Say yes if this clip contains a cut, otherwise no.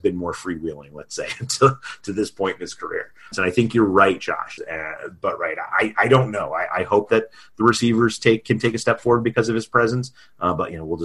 yes